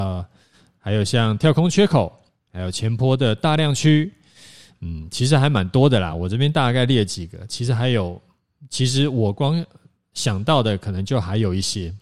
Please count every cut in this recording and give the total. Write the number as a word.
zero